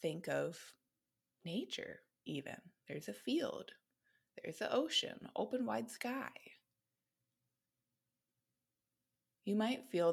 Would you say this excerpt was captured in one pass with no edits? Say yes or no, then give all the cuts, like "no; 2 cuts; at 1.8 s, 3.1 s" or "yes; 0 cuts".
yes; 0 cuts